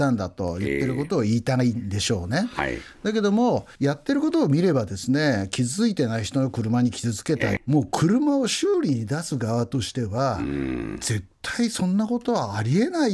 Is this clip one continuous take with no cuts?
no; 2 cuts; at 3.8 s, 7.6 s

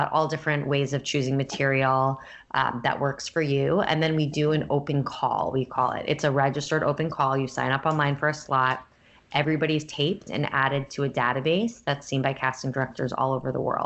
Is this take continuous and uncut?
yes; 0 cuts

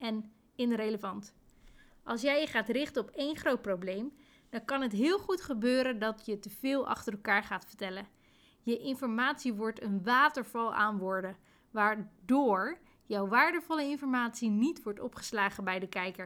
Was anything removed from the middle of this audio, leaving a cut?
no; 0 cuts

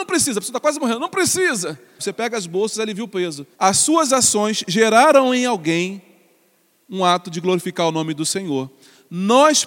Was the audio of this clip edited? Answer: yes; 2 cuts; at 2.0 s, 3.5 s

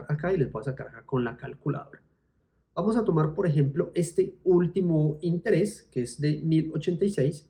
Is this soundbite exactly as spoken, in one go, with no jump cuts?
yes; 0 cuts

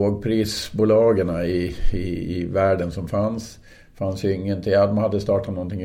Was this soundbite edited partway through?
no; 0 cuts

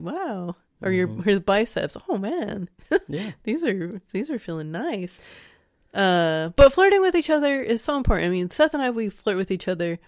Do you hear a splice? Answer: no; 0 cuts

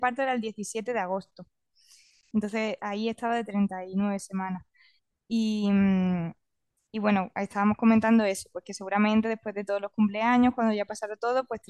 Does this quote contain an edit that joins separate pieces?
no; 0 cuts

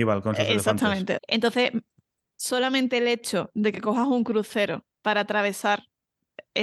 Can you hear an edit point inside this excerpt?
yes; 2 cuts; at 1.2 s, 4.9 s

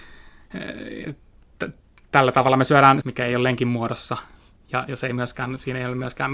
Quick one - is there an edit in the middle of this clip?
yes; 2 cuts; at 1.0 s, 3.0 s

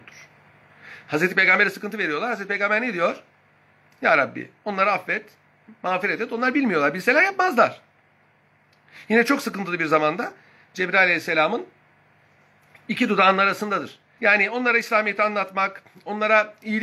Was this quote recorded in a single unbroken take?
no; 1 cut; at 14.2 s

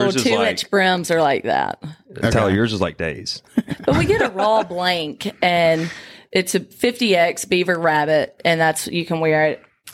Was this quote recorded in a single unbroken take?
yes; 0 cuts

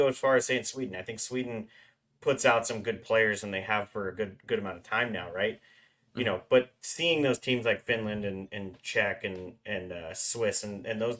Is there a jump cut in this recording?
no; 0 cuts

